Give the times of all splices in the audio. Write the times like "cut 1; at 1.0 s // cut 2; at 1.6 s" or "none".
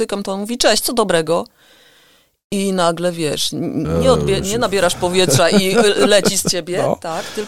none